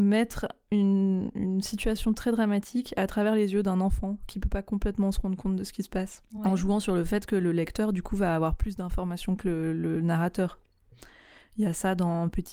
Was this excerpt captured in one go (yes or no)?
yes